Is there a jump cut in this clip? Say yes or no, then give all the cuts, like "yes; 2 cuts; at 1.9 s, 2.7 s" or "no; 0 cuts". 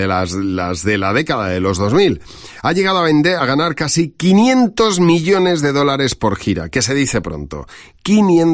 no; 0 cuts